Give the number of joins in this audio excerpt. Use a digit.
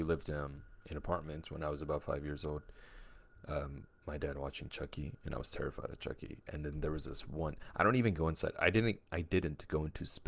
0